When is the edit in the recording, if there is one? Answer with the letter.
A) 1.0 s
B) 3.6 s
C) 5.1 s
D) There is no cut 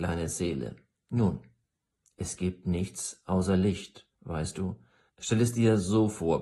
C